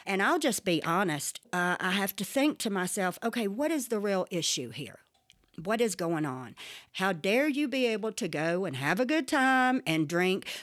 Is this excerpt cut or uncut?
cut